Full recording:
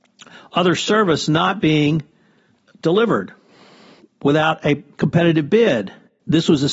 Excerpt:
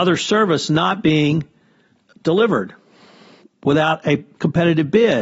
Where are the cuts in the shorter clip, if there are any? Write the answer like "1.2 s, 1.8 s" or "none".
none